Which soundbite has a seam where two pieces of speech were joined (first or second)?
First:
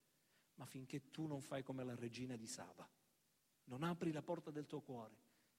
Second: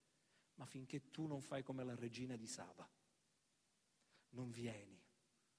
first